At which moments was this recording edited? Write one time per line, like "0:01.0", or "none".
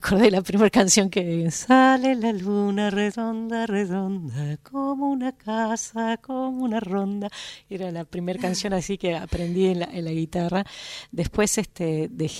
none